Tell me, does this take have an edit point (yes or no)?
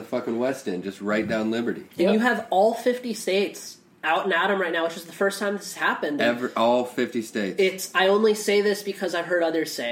no